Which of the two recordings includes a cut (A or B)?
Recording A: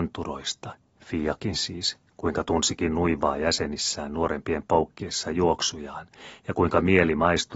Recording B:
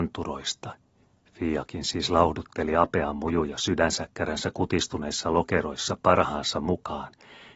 A